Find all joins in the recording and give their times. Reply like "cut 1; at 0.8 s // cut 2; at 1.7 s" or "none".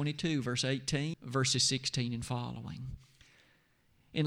cut 1; at 1.1 s